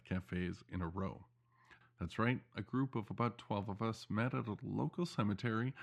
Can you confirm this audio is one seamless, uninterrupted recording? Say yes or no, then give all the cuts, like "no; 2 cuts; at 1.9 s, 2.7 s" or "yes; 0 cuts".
no; 1 cut; at 1.8 s